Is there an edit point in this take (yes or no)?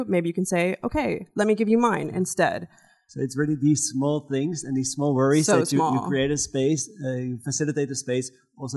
no